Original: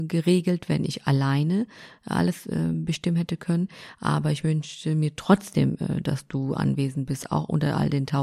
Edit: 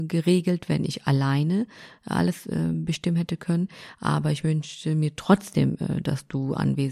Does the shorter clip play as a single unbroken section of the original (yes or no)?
yes